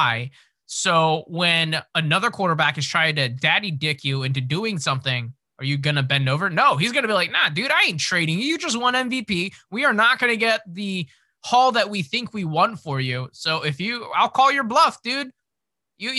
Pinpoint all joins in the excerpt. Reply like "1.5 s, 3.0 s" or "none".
none